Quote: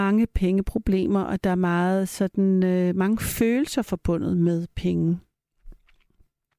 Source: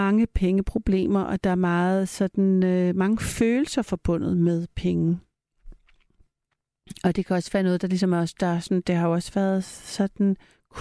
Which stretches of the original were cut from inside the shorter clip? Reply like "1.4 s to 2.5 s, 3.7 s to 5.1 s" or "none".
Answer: none

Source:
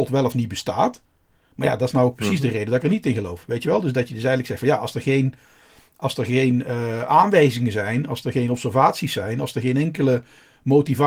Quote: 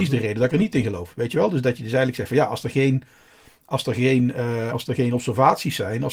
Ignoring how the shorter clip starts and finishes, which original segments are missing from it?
7.0 s to 8.1 s

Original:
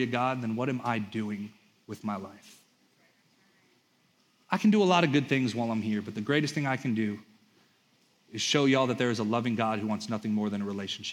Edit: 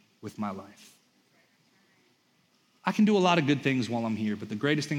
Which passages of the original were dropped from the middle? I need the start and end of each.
none

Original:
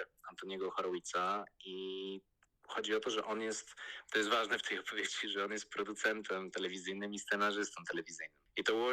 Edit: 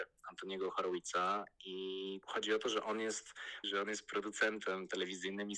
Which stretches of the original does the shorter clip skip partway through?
2.2 s to 2.6 s, 4.0 s to 5.3 s

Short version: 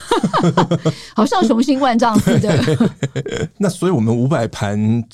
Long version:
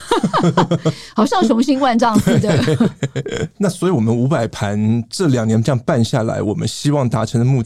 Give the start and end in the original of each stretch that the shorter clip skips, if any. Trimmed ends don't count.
none

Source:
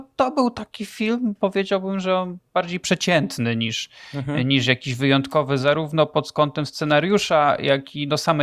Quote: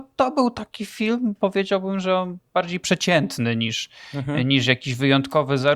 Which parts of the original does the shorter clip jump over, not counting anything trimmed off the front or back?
none

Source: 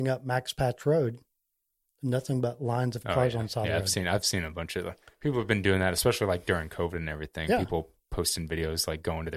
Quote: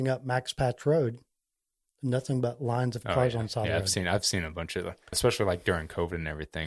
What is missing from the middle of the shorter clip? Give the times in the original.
5.1 s to 5.9 s

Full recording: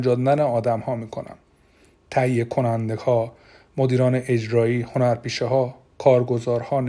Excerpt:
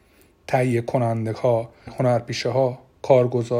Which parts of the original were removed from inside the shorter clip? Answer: 3.5 s to 4.8 s

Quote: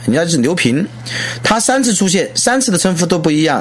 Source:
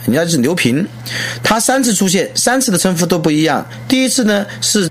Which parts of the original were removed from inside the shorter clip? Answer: none

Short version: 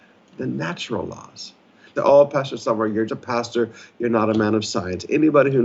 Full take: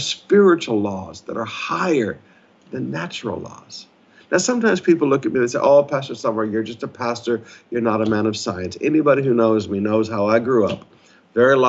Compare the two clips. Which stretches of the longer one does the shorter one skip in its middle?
4.3 s to 5.5 s, 6.6 s to 6.8 s

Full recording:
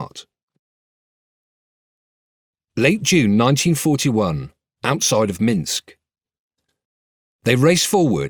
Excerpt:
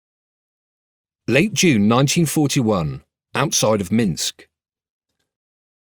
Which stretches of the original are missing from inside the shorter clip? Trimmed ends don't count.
none

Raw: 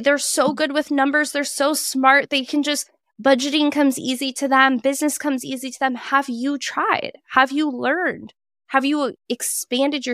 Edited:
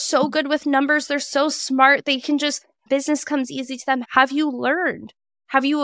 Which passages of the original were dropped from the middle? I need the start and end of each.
3.1 s to 4.8 s, 6.0 s to 7.2 s

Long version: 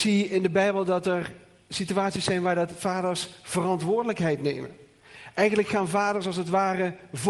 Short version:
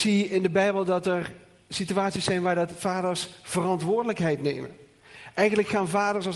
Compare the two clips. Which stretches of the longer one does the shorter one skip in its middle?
none

